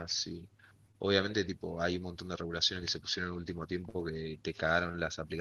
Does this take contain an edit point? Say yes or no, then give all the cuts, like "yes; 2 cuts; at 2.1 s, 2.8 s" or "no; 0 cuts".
no; 0 cuts